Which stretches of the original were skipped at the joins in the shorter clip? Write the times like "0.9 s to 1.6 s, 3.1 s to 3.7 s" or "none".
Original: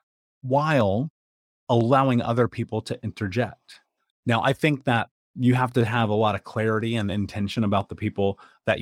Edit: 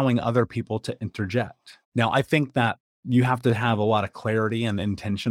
3.9 s to 4.2 s